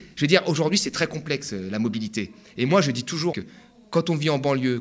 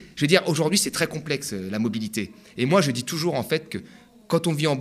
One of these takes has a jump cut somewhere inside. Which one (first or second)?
first